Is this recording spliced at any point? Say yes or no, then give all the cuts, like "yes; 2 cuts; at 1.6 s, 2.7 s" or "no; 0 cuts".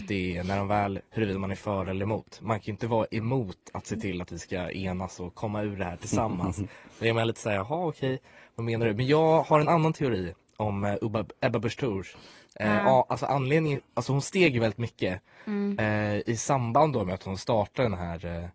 yes; 1 cut; at 1.0 s